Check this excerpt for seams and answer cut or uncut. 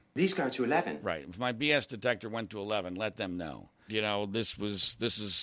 cut